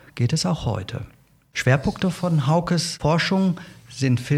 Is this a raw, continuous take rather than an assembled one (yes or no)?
no